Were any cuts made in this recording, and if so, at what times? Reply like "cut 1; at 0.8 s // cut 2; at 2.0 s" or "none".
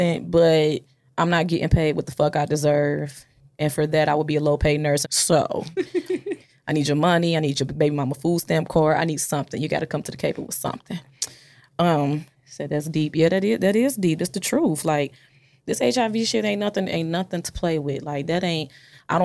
cut 1; at 5.0 s // cut 2; at 12.3 s

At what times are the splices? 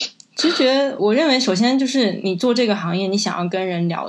cut 1; at 1.0 s

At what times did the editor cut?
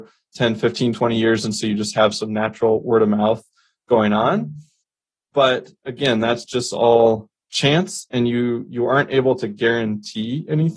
none

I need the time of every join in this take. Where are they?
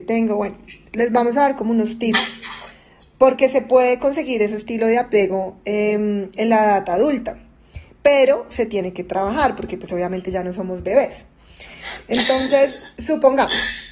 none

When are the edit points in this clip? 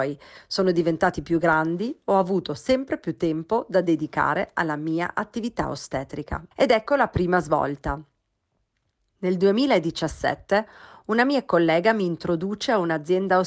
cut 1; at 6.5 s

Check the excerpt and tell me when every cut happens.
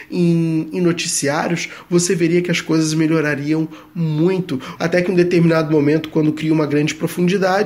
cut 1; at 4.8 s

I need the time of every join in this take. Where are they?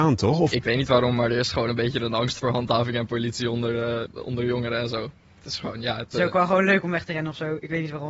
cut 1; at 4.1 s

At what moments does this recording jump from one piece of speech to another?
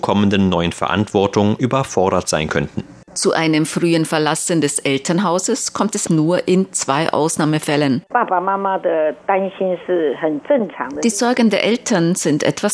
cut 1; at 3.1 s // cut 2; at 6.1 s // cut 3; at 8.1 s

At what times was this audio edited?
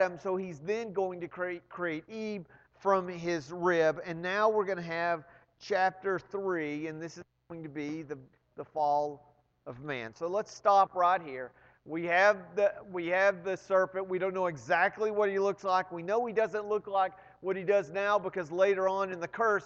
cut 1; at 10.1 s

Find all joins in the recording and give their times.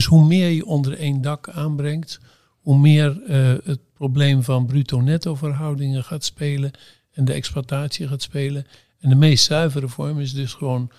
none

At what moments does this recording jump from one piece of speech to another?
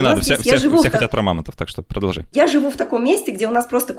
none

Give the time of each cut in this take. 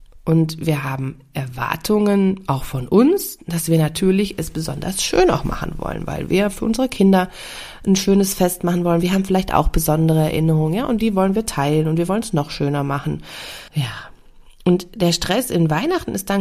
cut 1; at 13.7 s

